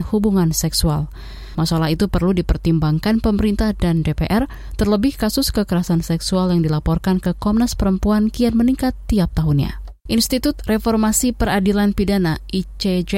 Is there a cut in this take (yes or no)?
yes